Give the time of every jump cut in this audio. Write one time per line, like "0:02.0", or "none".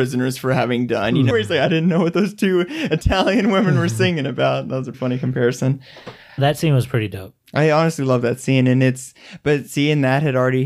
0:01.3
0:04.9
0:06.4